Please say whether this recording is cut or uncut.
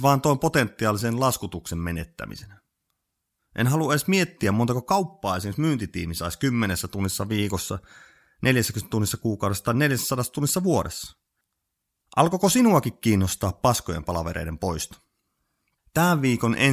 uncut